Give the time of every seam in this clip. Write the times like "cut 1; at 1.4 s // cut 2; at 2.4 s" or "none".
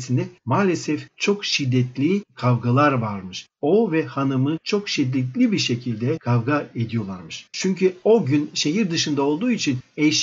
cut 1; at 7.5 s